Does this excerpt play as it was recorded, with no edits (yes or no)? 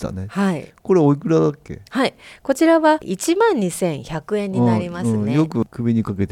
yes